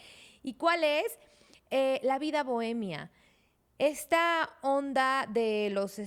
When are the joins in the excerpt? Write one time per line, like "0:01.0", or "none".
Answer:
none